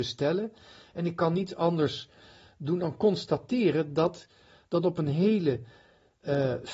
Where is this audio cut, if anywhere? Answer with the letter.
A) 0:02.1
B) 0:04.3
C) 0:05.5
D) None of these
D